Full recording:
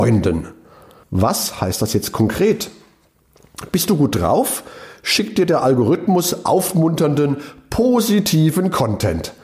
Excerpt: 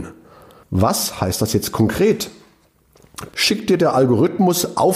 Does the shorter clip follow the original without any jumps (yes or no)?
no